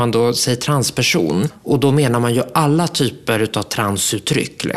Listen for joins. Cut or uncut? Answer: uncut